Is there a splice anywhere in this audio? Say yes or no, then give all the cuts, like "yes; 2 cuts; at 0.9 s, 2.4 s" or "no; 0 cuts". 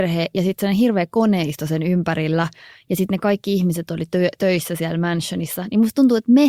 no; 0 cuts